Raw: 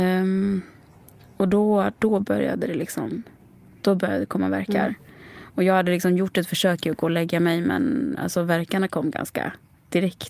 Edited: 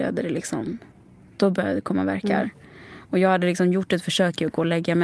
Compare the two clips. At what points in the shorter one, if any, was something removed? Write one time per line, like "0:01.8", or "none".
none